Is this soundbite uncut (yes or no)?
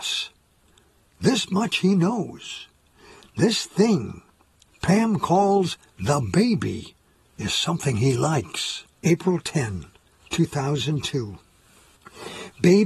no